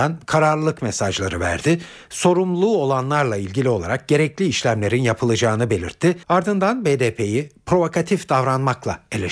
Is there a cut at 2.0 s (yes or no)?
no